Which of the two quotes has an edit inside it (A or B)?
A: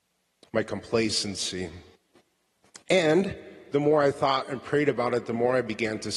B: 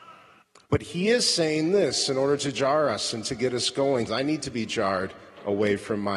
B